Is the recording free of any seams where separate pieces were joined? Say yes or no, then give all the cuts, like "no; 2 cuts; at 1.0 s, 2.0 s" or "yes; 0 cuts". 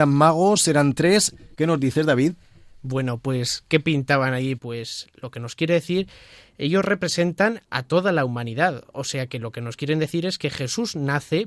no; 2 cuts; at 1.5 s, 4.6 s